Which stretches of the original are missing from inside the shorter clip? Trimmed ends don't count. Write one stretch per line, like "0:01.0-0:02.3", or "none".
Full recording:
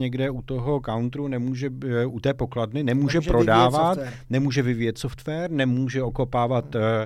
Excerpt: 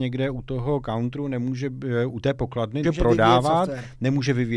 0:02.8-0:03.1